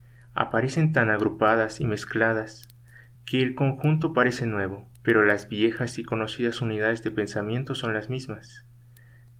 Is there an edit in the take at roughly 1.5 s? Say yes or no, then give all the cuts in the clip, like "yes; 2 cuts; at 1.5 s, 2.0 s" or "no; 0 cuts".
no; 2 cuts; at 3.2 s, 4.9 s